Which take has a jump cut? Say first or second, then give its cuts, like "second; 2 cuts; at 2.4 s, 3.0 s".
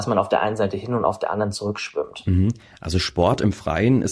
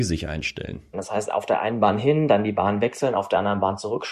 second; 1 cut; at 0.9 s